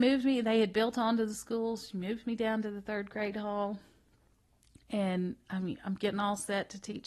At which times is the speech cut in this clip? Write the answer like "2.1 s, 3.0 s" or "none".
none